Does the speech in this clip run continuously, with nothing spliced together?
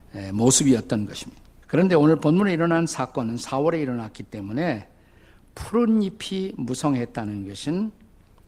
no; 1 cut; at 1.6 s

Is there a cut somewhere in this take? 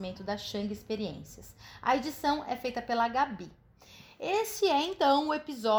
no; 0 cuts

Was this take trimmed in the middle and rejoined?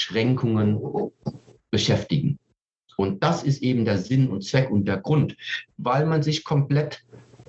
yes; 1 cut; at 5.7 s

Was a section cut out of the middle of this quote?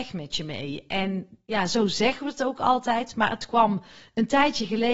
no; 0 cuts

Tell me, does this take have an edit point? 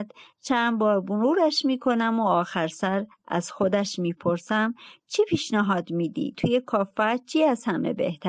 no; 0 cuts

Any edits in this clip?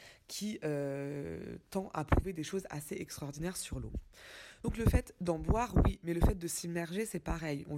no; 0 cuts

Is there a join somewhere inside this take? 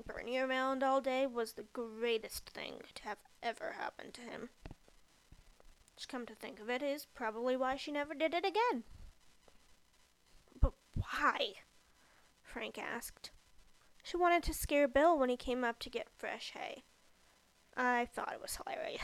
no; 0 cuts

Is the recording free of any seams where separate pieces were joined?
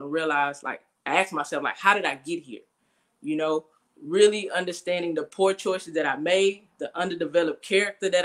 yes; 0 cuts

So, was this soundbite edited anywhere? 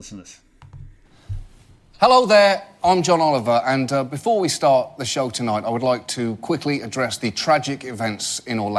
no; 0 cuts

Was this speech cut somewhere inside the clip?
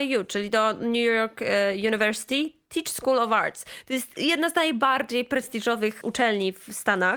yes; 1 cut; at 6.0 s

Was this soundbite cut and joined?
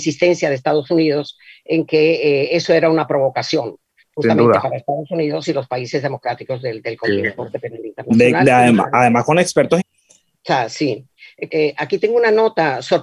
yes; 3 cuts; at 7.4 s, 9.8 s, 11.5 s

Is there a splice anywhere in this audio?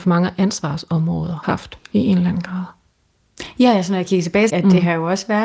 yes; 2 cuts; at 1.4 s, 4.5 s

